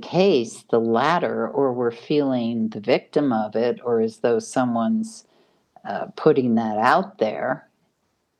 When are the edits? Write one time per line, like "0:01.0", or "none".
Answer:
none

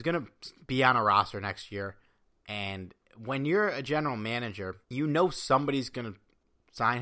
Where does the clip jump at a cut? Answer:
0:04.8

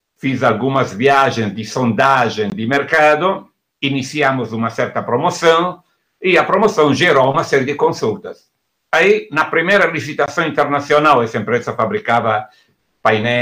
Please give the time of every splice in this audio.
none

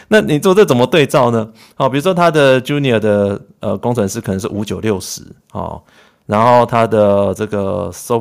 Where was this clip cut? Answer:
none

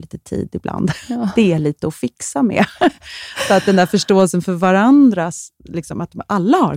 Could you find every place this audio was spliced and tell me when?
none

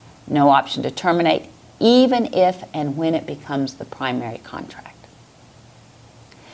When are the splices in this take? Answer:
none

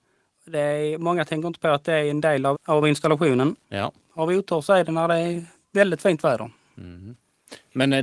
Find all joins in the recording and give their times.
0:02.5
0:03.6

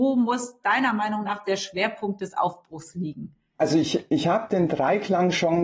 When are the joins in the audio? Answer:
none

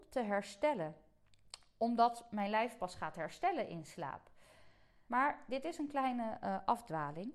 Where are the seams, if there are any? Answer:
0:05.1

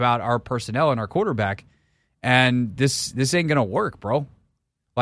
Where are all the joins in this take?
none

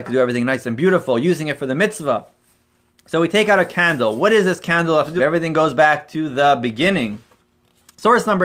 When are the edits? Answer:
0:05.2

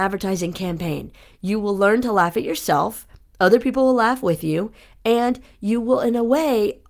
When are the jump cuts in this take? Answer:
none

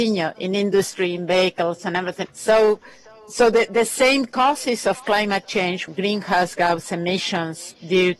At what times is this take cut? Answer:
0:02.2
0:05.9

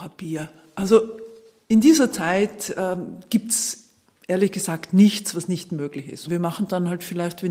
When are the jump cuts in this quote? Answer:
0:06.3

